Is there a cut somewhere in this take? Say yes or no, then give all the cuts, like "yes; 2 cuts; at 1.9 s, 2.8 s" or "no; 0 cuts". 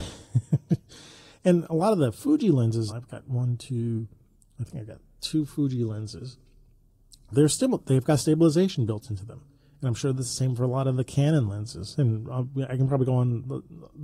yes; 1 cut; at 2.9 s